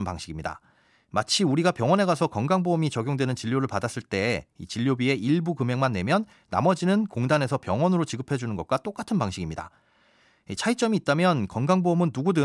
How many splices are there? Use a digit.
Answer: 0